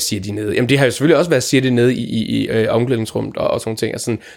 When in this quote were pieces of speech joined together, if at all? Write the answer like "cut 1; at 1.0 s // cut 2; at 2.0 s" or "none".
none